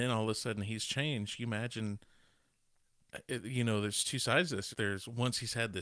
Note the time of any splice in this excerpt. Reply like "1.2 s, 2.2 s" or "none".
4.7 s